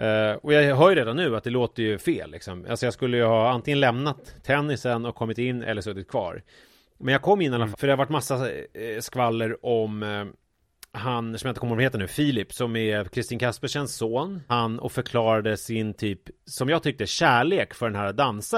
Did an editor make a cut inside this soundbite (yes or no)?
yes